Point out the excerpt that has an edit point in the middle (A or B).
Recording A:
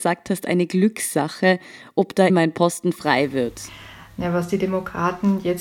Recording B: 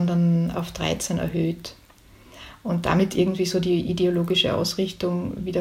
A